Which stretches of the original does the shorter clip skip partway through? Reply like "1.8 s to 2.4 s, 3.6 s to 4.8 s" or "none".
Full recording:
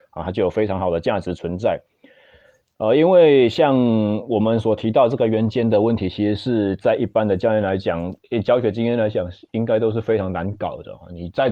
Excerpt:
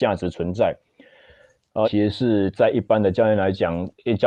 2.9 s to 6.1 s